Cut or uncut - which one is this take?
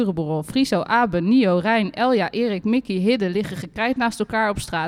uncut